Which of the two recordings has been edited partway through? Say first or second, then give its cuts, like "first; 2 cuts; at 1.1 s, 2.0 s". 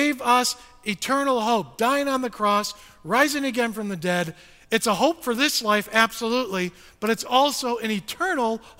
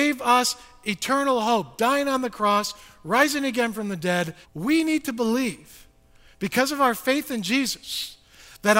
second; 1 cut; at 4.4 s